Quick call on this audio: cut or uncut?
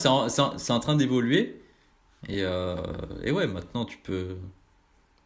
uncut